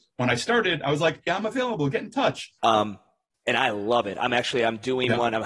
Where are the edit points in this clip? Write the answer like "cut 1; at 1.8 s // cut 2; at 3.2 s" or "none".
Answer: cut 1; at 1.3 s // cut 2; at 2.6 s